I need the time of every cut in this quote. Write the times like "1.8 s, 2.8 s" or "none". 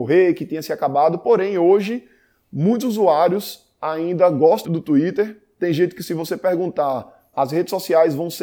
4.6 s, 7.3 s